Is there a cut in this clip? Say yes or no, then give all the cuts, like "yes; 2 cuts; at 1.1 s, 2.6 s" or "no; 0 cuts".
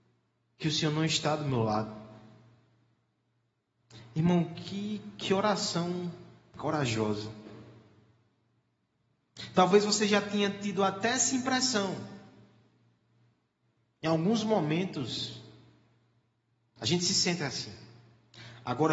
no; 0 cuts